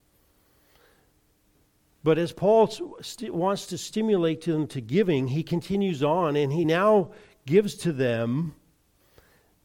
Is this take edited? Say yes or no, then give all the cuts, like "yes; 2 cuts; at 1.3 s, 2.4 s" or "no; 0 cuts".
no; 0 cuts